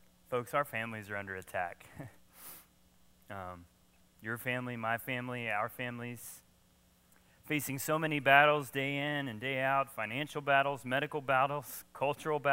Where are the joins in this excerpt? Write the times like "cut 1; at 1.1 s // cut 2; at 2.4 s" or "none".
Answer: none